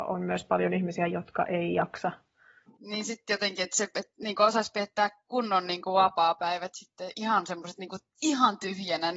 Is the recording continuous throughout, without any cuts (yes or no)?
no